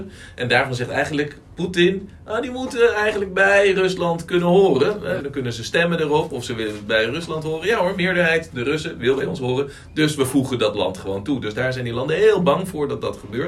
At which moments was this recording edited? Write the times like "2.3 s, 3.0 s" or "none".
5.2 s